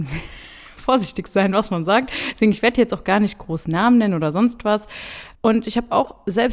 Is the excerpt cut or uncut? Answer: cut